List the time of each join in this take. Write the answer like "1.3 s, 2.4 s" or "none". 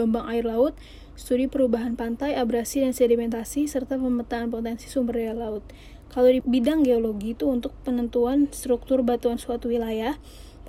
6.4 s